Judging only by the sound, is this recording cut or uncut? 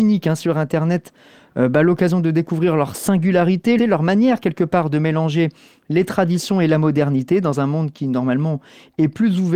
cut